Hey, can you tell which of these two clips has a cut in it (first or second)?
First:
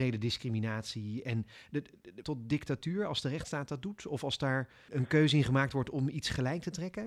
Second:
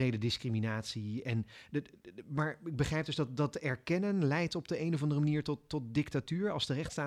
first